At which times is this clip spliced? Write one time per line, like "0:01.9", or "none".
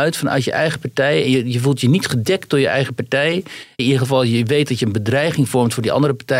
0:03.8

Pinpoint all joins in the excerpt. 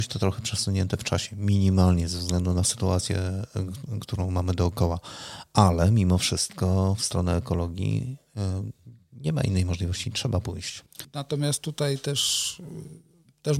0:11.0

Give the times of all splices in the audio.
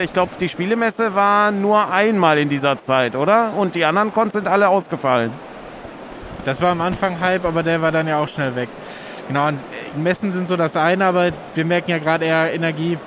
0:06.4
0:09.9

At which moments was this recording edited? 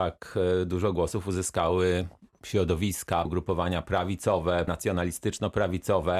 0:03.3
0:04.7

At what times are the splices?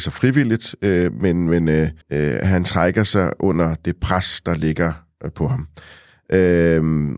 0:02.0

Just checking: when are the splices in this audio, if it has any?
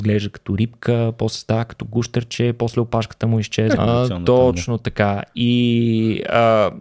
0:03.8

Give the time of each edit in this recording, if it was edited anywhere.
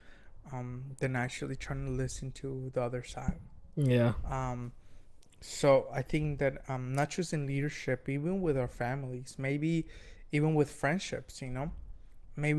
none

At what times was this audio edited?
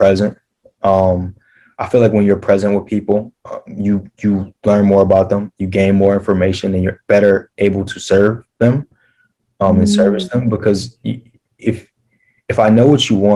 0:03.4

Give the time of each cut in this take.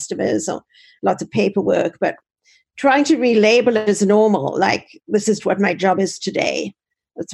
0:05.4

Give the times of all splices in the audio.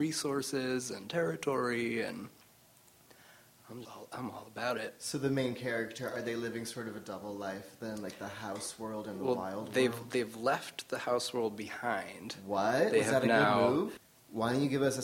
0:03.8
0:14.0

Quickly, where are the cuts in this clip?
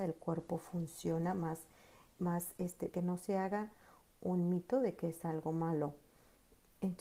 0:02.9

